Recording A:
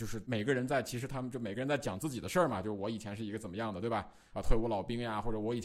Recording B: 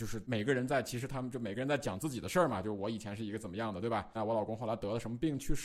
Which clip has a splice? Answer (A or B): B